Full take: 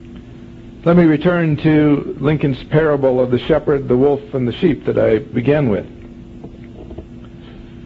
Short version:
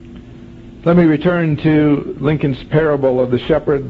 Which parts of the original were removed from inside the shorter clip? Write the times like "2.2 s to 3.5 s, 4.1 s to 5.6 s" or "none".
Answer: none

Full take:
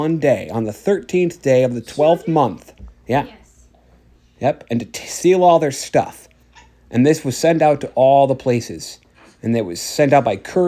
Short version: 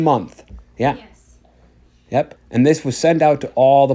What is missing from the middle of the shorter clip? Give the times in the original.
4.7 s to 6.8 s

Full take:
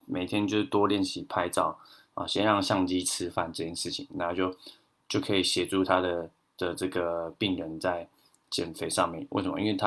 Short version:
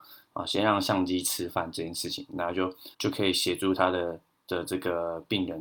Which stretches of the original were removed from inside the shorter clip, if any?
4.7 s to 5.0 s

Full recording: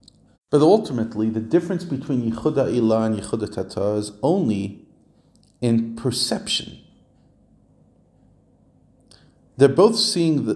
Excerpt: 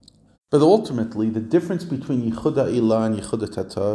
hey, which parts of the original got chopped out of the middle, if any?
none

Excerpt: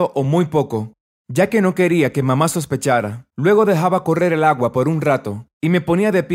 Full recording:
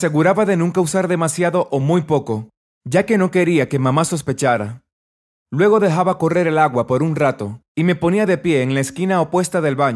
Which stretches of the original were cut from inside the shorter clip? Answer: 4.9 s to 5.4 s

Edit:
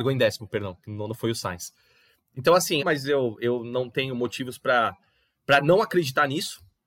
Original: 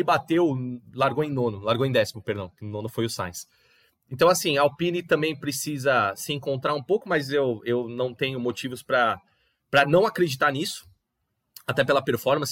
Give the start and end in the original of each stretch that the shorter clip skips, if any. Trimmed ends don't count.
4.5 s to 7.0 s

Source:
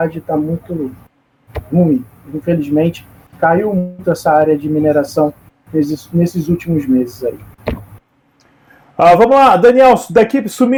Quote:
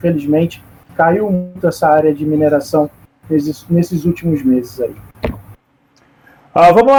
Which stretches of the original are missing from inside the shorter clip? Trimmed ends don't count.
none

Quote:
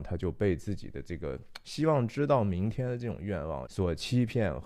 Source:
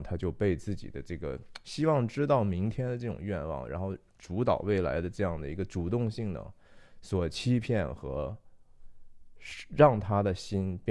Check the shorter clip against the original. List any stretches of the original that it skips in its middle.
3.7 s to 7.0 s

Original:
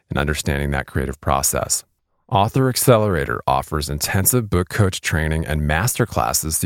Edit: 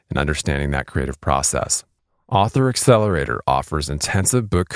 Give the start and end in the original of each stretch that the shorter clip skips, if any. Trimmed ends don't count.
none

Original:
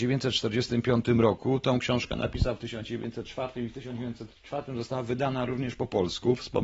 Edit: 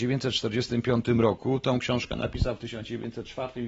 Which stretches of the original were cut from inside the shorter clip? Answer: none

